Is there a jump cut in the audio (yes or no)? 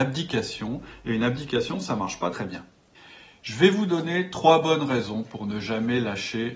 yes